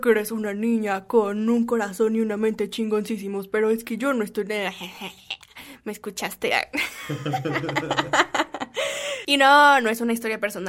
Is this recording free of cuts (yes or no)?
yes